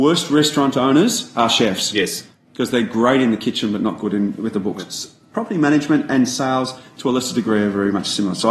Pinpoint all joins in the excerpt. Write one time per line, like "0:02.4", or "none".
none